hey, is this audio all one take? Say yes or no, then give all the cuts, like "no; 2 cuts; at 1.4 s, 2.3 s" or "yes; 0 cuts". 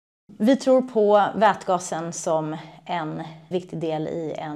no; 1 cut; at 3.5 s